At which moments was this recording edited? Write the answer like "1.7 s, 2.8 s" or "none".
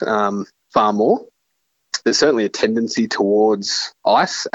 2.0 s